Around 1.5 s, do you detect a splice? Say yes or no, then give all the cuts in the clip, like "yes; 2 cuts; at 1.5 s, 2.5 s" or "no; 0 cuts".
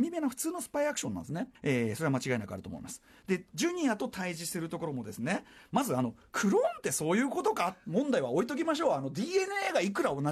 yes; 2 cuts; at 1.5 s, 3.2 s